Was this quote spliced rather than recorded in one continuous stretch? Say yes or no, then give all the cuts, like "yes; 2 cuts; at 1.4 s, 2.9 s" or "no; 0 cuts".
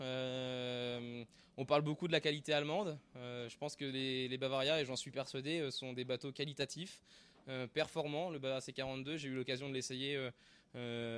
no; 0 cuts